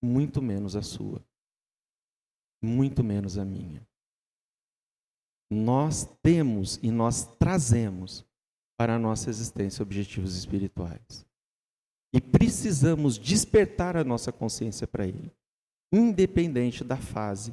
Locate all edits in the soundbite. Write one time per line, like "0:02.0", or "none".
none